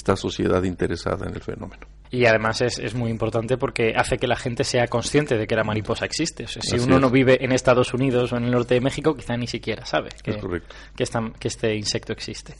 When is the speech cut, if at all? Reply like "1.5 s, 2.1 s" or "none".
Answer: 2.0 s